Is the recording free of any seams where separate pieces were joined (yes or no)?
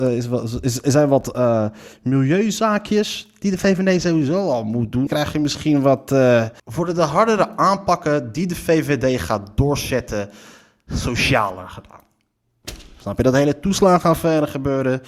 no